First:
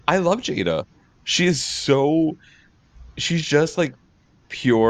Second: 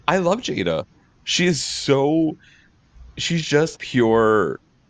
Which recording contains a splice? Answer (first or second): second